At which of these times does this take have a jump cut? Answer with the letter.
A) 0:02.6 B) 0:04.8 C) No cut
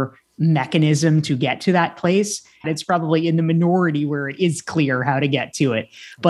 A